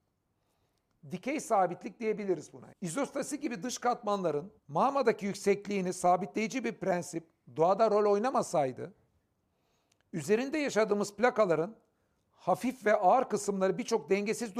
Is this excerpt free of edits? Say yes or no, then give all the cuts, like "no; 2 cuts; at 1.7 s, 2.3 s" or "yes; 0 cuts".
no; 2 cuts; at 2.7 s, 4.6 s